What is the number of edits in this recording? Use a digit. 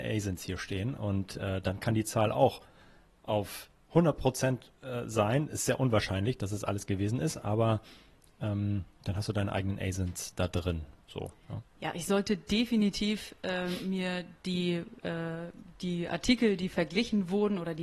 0